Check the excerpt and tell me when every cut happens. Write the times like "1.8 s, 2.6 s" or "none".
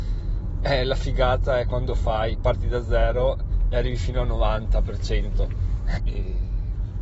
6.0 s

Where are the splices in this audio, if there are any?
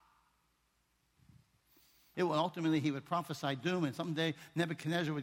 2.1 s

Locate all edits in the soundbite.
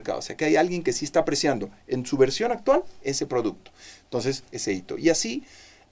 4.5 s

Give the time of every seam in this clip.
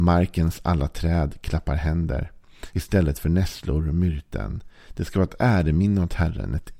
2.7 s

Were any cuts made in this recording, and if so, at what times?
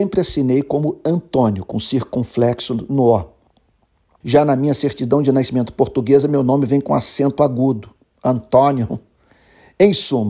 4.2 s

